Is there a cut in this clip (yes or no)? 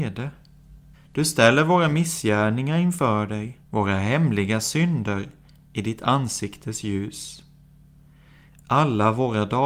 yes